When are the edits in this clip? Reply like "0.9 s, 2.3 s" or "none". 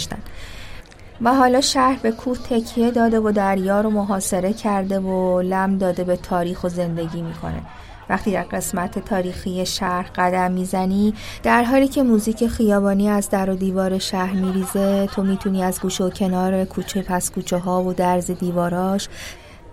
1.1 s